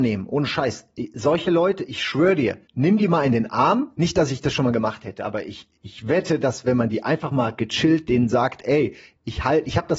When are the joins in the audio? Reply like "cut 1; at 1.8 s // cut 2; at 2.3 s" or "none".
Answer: cut 1; at 2.6 s

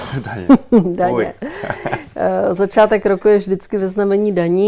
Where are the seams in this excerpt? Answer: none

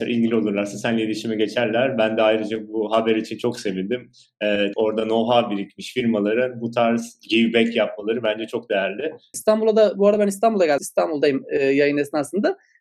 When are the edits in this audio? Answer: cut 1; at 4.7 s // cut 2; at 9.3 s // cut 3; at 10.8 s

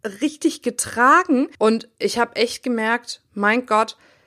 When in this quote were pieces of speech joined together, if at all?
cut 1; at 1.5 s

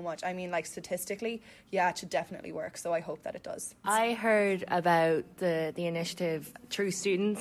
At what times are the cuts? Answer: cut 1; at 3.8 s

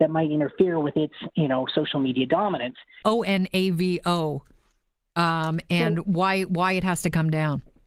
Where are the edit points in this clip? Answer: cut 1; at 3.0 s

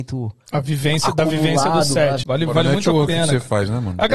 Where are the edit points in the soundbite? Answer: cut 1; at 2.2 s

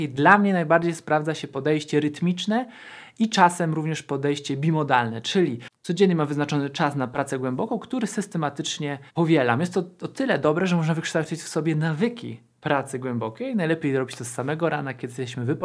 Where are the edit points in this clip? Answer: cut 1; at 9.1 s

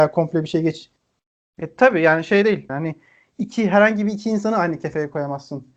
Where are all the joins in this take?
cut 1; at 1.0 s // cut 2; at 2.7 s

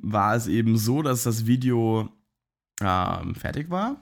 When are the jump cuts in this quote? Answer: none

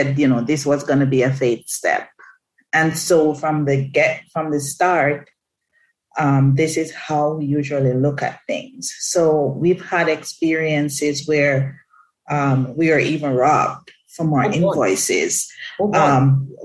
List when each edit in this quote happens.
none

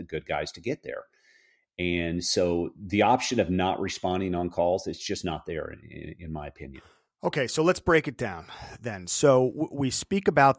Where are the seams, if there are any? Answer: none

